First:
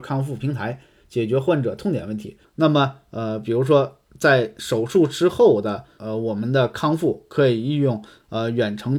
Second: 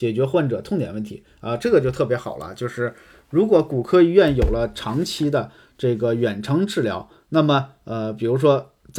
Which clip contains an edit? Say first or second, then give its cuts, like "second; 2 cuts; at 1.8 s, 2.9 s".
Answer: first; 2 cuts; at 2.4 s, 6.0 s